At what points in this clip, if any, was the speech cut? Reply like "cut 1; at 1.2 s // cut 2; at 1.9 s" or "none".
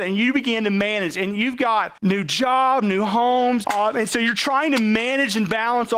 cut 1; at 2.0 s // cut 2; at 3.6 s